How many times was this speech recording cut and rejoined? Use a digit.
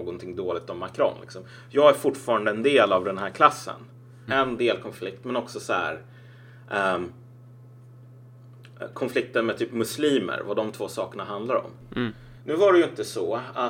1